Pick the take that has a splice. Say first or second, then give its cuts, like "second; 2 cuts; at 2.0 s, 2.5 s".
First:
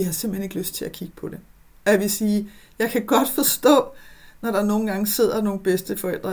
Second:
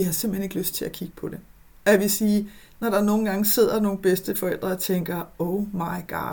second; 1 cut; at 2.7 s